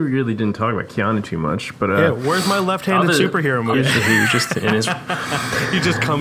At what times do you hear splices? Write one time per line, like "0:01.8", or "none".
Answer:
0:03.7

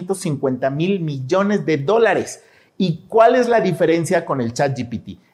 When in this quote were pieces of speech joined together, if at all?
none

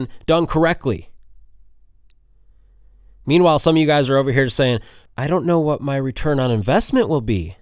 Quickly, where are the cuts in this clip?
0:05.1

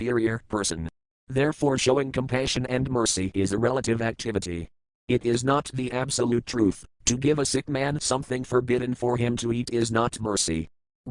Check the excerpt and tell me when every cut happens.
0:06.9

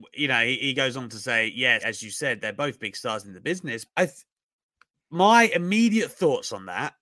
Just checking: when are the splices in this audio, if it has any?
0:01.8
0:03.9

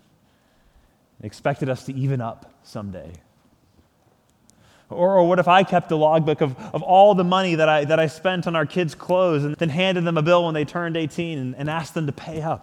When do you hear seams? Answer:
0:09.5

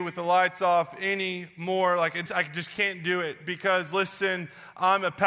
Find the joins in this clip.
0:02.3

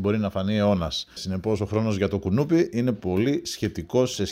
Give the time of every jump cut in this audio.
0:01.2

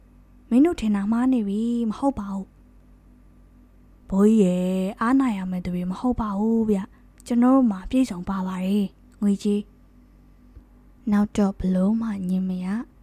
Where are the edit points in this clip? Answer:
none

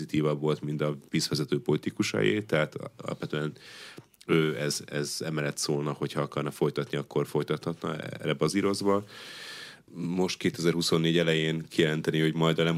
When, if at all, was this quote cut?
0:09.9

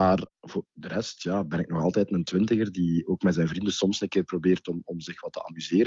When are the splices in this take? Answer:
none

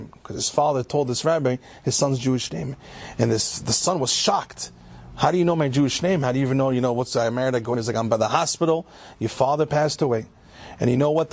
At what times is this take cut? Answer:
0:07.7

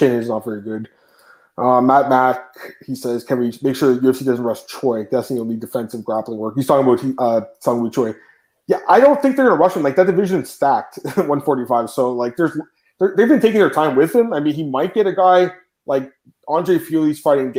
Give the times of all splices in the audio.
none

